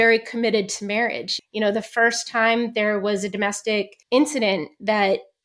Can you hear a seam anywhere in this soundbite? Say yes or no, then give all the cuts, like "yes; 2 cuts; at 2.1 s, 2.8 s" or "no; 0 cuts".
yes; 2 cuts; at 1.4 s, 4.0 s